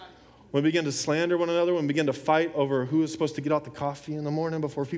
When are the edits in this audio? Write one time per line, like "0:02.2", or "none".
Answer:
none